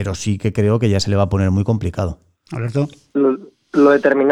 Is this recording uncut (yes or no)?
yes